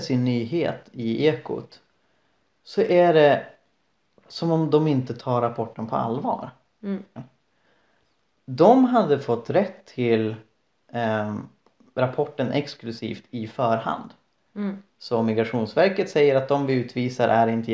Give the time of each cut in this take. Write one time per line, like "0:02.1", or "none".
0:07.2
0:14.9

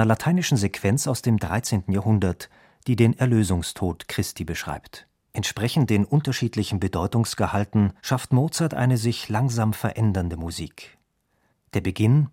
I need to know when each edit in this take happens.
0:05.2
0:08.0

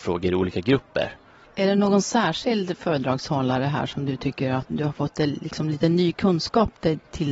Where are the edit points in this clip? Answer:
0:01.4
0:04.7

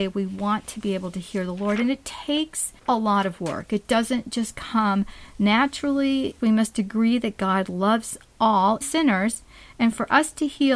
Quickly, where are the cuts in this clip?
0:02.8
0:06.4
0:08.8

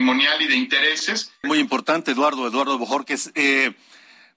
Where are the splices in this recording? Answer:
0:01.4

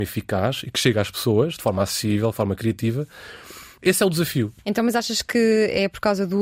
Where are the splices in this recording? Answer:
0:03.8

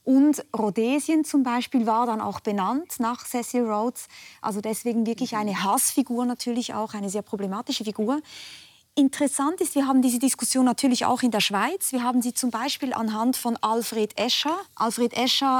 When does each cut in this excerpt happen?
0:14.7

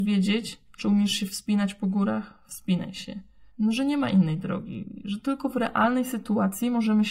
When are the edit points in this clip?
0:03.5

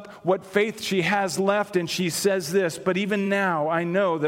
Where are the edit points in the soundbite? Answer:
none

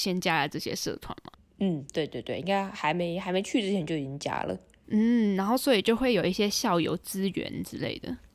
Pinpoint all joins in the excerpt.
none

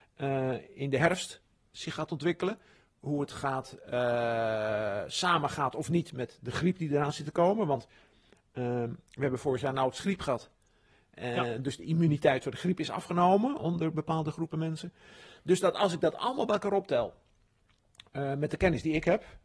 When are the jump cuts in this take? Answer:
none

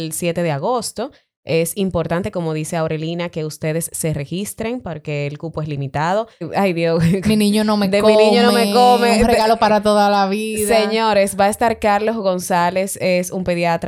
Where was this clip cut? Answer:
0:06.4

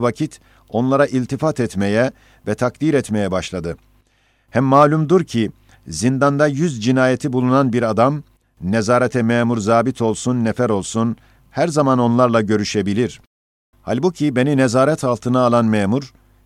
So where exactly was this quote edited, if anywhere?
0:13.7

